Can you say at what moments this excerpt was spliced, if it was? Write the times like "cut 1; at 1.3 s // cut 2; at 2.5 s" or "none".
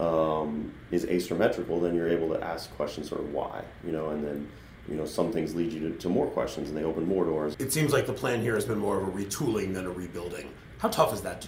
cut 1; at 7.5 s